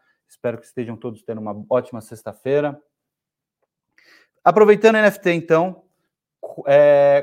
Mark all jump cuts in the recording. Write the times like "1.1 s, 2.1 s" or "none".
none

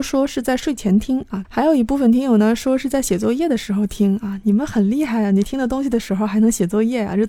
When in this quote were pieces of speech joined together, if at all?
1.4 s

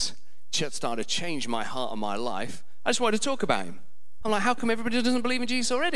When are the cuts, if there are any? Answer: 4.2 s

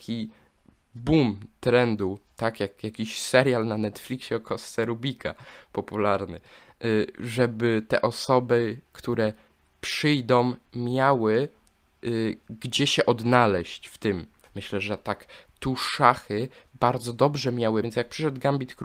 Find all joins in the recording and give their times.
14.4 s, 17.8 s

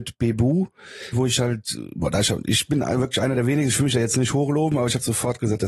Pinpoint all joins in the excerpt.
1.1 s

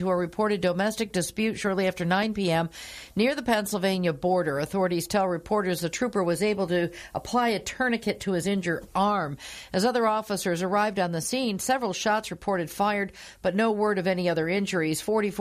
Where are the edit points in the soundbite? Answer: none

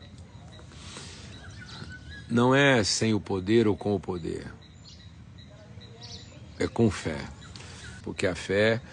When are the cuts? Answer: 8.0 s

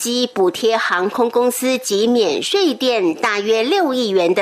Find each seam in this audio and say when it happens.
none

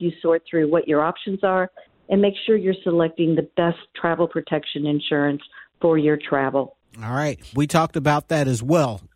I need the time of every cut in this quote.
7.5 s

